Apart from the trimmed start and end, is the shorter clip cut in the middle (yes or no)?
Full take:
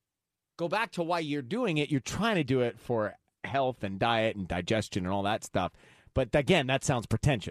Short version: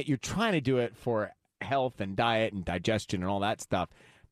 no